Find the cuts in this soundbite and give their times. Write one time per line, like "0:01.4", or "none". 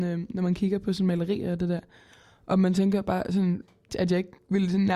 0:03.9